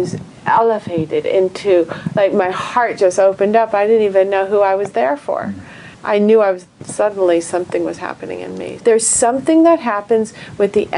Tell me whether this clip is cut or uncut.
cut